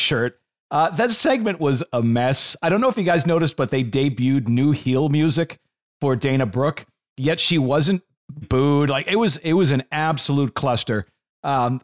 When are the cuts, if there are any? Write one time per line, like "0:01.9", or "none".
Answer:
0:08.4